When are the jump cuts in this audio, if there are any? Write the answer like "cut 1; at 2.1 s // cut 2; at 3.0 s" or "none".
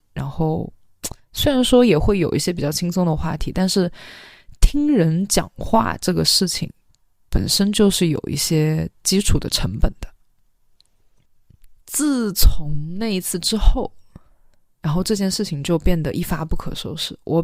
cut 1; at 11.8 s